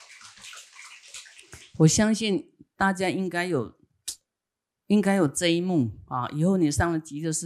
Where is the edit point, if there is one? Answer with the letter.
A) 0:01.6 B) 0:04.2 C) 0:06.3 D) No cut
D